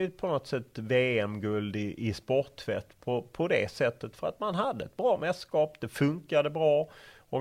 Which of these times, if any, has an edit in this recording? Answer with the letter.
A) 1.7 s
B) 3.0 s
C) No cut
C